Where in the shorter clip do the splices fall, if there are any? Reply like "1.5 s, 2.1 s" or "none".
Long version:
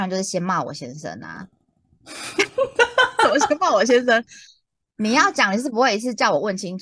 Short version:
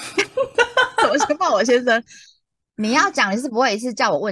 none